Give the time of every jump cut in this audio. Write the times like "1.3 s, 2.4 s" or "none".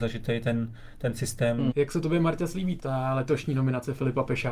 1.7 s, 2.8 s